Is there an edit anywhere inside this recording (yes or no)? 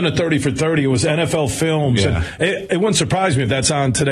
no